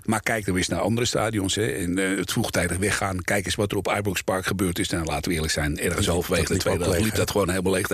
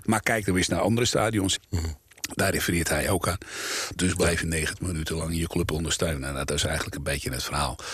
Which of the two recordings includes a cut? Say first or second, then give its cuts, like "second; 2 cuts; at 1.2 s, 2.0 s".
second; 2 cuts; at 1.6 s, 4.0 s